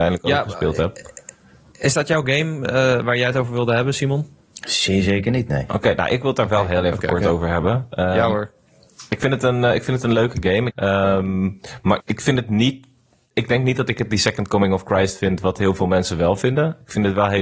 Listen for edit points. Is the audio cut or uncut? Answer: cut